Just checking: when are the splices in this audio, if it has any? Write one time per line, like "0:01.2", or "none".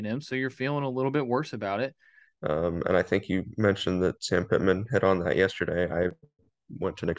0:02.3